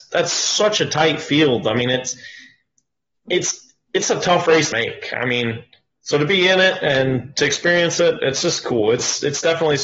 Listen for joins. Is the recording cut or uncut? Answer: cut